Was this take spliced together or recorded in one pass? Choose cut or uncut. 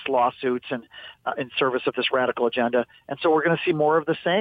uncut